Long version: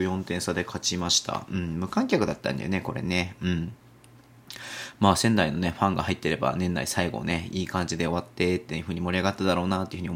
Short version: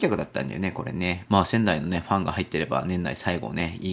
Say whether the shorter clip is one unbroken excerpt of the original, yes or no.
no